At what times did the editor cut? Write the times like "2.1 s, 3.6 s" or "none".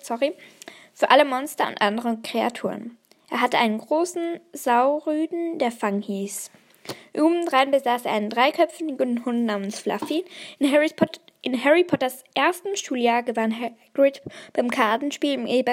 none